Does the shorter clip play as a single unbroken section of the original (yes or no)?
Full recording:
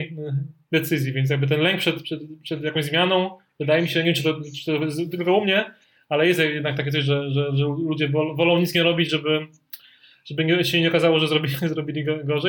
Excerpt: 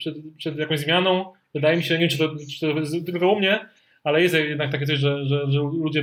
yes